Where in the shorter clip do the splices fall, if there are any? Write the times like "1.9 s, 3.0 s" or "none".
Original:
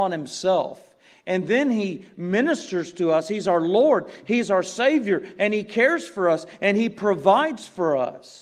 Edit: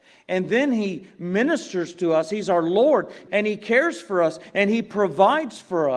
3.3 s